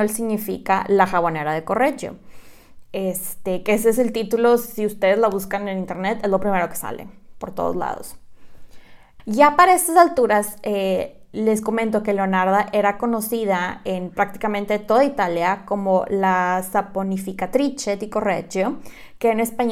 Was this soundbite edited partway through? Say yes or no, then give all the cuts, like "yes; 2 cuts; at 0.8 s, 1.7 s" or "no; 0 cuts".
yes; 1 cut; at 9.2 s